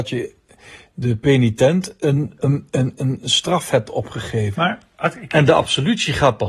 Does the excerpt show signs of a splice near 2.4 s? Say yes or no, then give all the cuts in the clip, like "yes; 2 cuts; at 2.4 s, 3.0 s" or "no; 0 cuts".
yes; 2 cuts; at 2.4 s, 4.5 s